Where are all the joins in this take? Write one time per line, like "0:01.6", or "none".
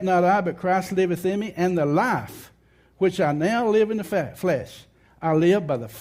none